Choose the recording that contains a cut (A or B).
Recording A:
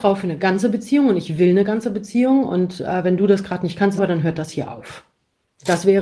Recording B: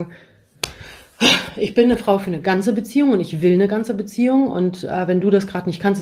A